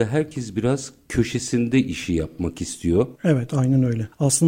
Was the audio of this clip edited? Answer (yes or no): yes